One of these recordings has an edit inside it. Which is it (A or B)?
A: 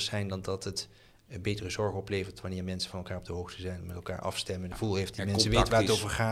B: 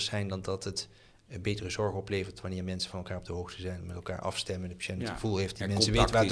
A